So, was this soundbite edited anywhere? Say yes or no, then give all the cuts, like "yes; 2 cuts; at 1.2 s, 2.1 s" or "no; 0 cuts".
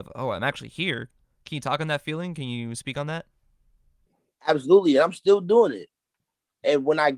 no; 0 cuts